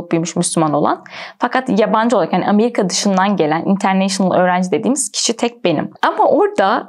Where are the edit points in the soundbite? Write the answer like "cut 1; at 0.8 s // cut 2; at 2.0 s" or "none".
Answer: cut 1; at 5.9 s